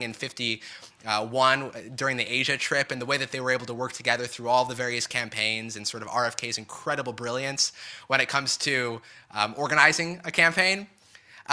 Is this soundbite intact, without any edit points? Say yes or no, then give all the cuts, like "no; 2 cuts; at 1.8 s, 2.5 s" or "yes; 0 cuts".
yes; 0 cuts